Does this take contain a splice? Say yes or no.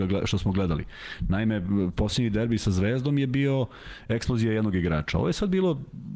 no